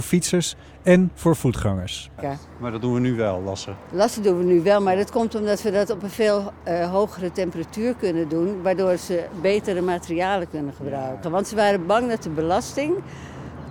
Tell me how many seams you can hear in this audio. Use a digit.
2